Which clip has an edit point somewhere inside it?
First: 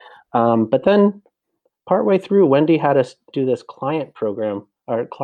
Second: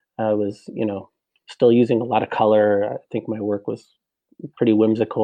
first; 1 cut; at 3.3 s

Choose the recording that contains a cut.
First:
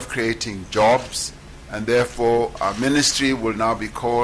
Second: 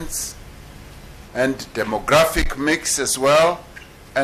second; 1 cut; at 1.3 s

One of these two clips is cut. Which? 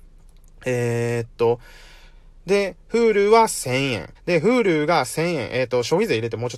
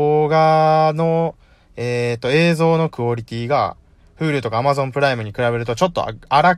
first; 1 cut; at 4.2 s

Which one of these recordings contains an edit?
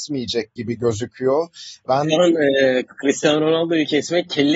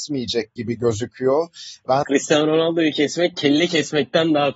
second; 1 cut; at 2.0 s

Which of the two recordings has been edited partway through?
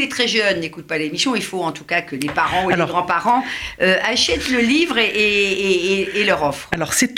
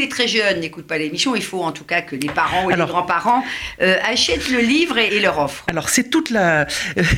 second; 1 cut; at 5.1 s

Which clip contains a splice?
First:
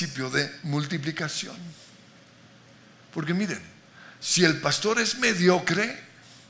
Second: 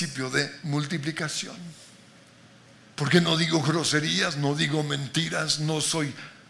second; 1 cut; at 2.9 s

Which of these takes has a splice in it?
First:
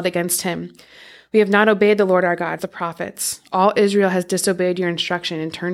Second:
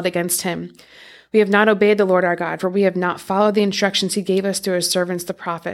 first; 1 cut; at 2.6 s

